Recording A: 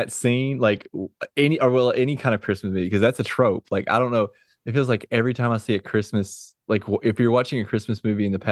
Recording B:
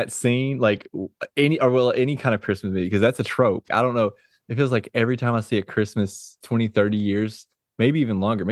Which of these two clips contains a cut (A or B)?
B